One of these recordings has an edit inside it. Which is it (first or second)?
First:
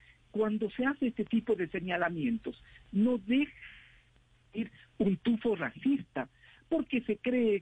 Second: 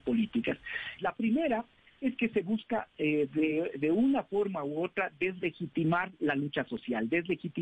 second